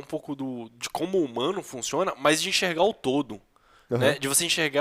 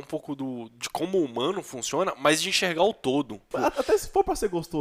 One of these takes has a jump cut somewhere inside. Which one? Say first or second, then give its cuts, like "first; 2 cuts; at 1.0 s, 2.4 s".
second; 1 cut; at 3.5 s